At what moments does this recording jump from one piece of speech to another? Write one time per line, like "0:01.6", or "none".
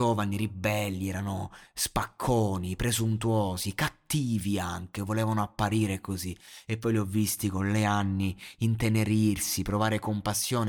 none